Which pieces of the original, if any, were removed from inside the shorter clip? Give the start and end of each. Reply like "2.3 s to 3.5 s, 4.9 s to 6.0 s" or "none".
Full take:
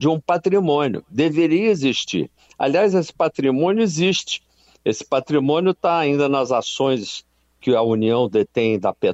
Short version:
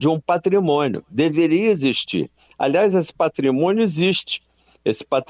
none